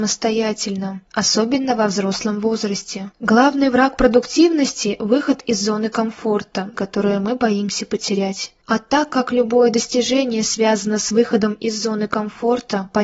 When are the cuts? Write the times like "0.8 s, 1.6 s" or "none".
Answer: 6.7 s